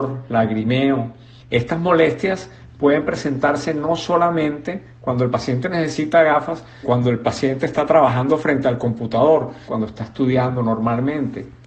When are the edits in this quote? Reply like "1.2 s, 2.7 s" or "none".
1.4 s, 6.8 s, 9.7 s